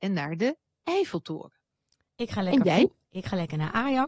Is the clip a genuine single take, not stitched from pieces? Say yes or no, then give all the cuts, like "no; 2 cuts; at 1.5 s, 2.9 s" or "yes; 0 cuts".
no; 1 cut; at 2.1 s